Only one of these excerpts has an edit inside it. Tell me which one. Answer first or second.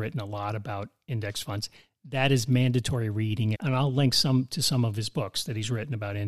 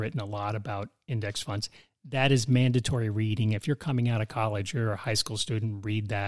first